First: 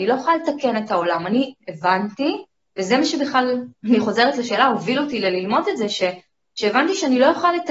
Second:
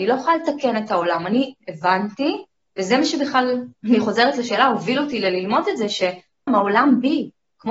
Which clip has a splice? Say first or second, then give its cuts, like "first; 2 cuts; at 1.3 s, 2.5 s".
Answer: second; 1 cut; at 6.5 s